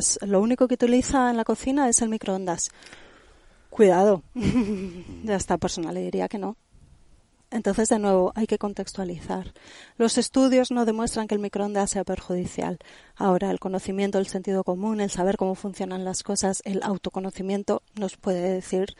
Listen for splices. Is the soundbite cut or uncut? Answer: uncut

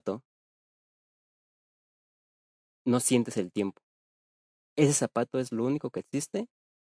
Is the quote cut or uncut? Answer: cut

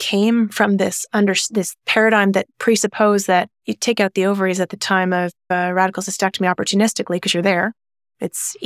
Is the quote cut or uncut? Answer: uncut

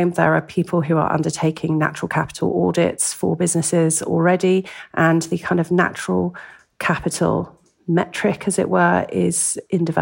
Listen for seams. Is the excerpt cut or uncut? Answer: uncut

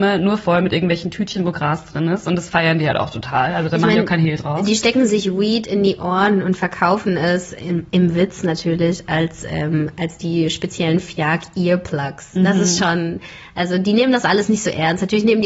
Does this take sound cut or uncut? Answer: uncut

